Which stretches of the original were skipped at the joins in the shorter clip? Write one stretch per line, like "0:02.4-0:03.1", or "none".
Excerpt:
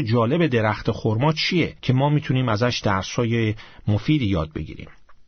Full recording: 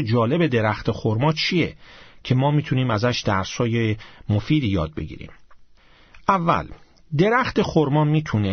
0:01.8-0:02.2